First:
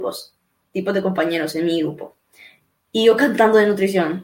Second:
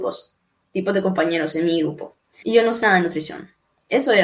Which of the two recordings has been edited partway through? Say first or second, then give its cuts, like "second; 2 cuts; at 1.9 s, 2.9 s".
second; 1 cut; at 2.4 s